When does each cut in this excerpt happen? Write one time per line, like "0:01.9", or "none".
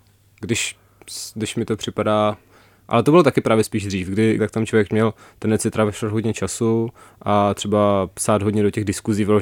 0:04.4